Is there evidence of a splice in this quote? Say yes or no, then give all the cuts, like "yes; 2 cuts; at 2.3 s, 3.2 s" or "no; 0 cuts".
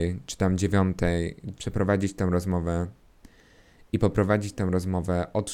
yes; 1 cut; at 1.6 s